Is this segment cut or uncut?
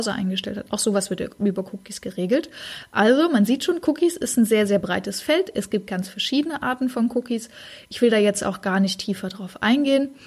uncut